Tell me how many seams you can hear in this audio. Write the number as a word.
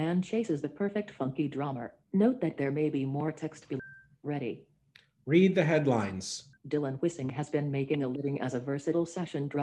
two